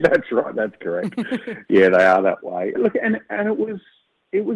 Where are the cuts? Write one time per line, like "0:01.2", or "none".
0:02.7